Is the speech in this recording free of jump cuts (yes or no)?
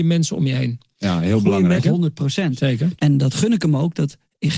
no